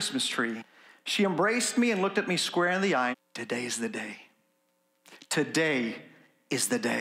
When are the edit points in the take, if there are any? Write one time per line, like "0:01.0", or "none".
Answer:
0:03.1